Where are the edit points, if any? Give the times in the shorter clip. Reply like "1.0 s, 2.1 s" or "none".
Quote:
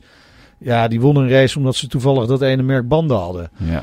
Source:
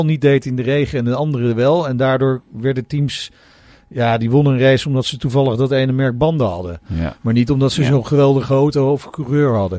none